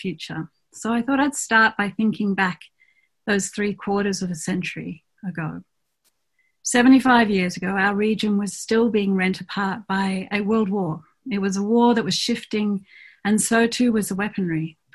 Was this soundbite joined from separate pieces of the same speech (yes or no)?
no